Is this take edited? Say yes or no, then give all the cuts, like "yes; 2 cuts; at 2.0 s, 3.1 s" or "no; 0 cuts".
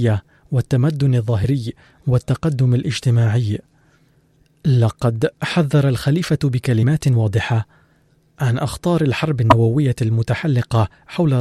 no; 0 cuts